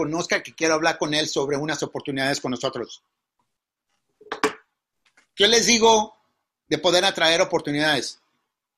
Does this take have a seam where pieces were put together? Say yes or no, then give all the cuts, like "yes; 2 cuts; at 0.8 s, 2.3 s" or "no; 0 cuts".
no; 0 cuts